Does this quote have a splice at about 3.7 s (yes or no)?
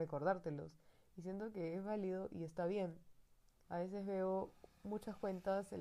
yes